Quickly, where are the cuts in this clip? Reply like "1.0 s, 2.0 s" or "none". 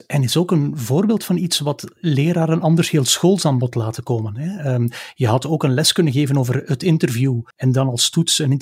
7.5 s

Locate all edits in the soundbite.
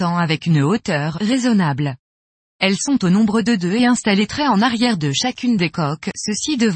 2.4 s

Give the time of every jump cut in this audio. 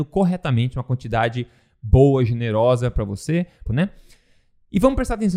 3.7 s

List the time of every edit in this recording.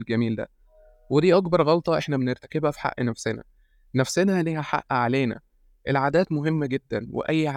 none

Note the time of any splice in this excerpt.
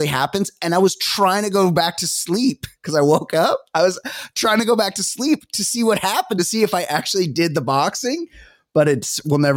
none

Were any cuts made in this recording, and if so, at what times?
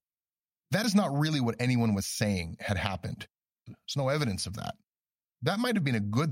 3.7 s

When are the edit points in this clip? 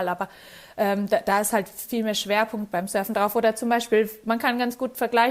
none

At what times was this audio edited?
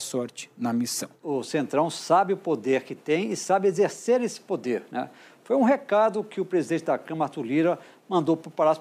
none

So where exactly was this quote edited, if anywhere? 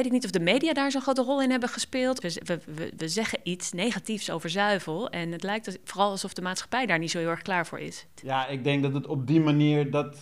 2.2 s, 8.2 s

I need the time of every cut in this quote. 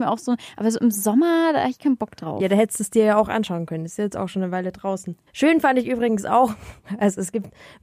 5.3 s

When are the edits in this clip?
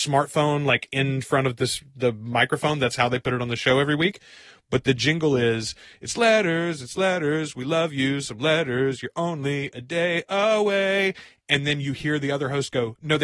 none

